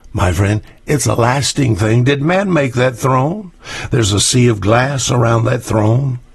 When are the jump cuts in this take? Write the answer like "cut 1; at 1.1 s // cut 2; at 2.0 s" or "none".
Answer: none